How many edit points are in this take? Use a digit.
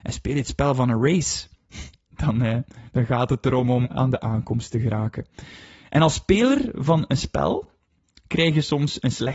1